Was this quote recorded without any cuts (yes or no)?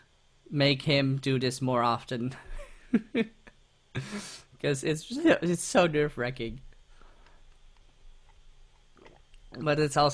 yes